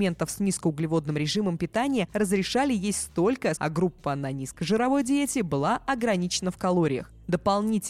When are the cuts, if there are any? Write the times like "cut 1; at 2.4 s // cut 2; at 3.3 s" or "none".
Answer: cut 1; at 3.6 s